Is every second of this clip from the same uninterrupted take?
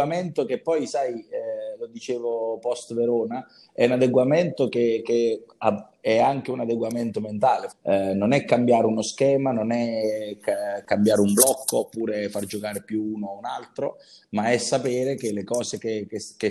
no; 1 cut; at 7.7 s

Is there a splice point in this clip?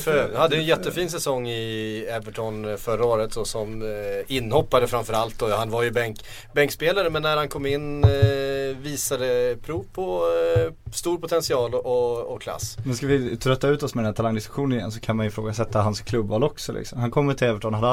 no; 0 cuts

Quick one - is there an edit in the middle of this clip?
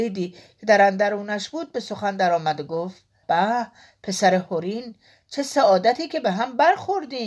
yes; 1 cut; at 3.2 s

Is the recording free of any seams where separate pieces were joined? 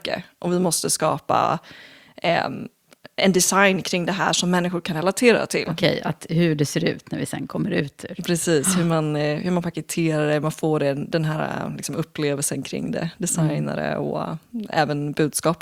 no; 1 cut; at 5.6 s

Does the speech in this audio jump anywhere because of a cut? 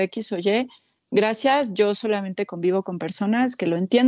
no; 0 cuts

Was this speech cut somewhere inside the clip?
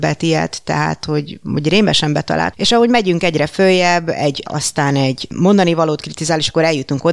yes; 2 cuts; at 2.5 s, 4.5 s

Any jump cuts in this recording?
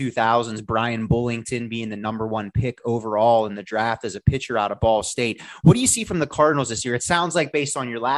no; 0 cuts

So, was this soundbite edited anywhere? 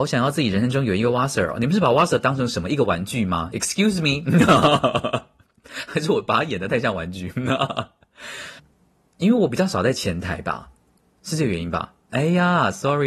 yes; 2 cuts; at 8.6 s, 12.1 s

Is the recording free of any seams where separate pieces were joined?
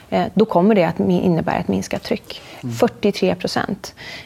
no; 1 cut; at 2.6 s

